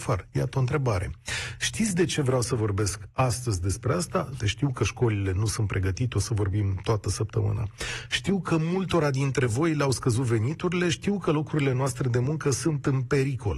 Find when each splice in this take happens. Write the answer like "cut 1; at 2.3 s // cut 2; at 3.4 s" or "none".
cut 1; at 4.4 s